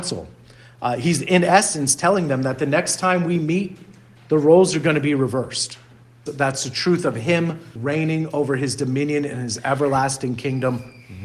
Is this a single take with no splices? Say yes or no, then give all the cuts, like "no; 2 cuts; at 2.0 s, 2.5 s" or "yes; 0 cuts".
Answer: no; 2 cuts; at 6.3 s, 7.8 s